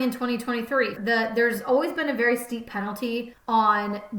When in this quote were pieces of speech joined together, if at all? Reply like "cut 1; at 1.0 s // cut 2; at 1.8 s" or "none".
cut 1; at 1.0 s